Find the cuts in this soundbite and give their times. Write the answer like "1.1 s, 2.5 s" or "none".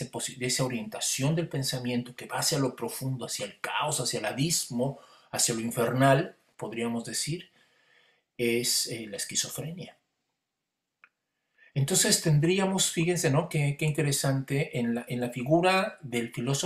none